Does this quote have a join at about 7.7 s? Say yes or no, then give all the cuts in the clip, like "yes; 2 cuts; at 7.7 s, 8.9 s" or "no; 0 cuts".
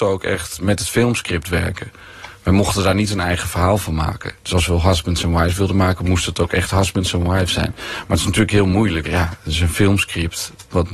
no; 2 cuts; at 4.4 s, 9.0 s